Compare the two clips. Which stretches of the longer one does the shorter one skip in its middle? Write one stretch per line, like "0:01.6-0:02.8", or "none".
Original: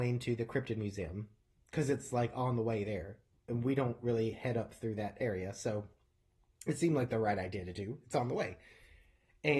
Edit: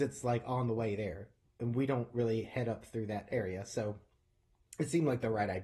none